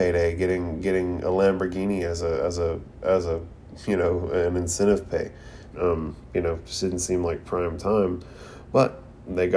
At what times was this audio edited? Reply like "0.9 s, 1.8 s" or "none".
5.7 s